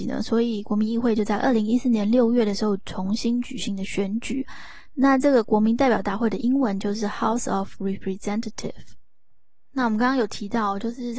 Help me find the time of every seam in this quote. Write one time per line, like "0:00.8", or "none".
0:04.9